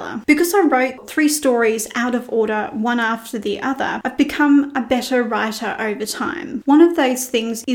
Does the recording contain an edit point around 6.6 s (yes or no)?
yes